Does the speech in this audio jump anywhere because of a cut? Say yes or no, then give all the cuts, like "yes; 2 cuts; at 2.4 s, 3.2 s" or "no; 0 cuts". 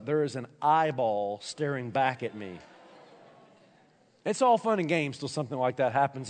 no; 0 cuts